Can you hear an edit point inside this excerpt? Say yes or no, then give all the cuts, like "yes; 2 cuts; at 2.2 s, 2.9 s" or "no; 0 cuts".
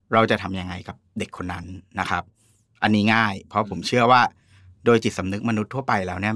no; 0 cuts